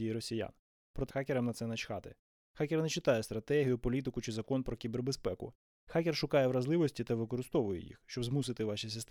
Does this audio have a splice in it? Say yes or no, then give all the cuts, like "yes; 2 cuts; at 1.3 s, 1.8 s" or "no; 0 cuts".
yes; 1 cut; at 1.1 s